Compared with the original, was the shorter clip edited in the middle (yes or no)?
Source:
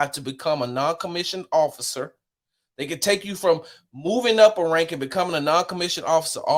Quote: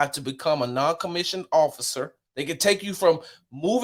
yes